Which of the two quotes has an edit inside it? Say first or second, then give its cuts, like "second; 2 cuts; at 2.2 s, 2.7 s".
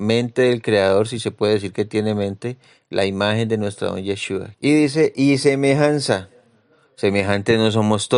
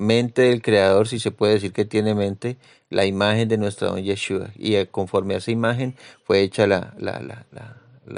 first; 1 cut; at 4.5 s